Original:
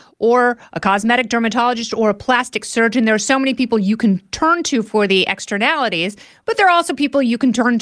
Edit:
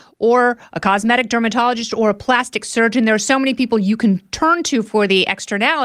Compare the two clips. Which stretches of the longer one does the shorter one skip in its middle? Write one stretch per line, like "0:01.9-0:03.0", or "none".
none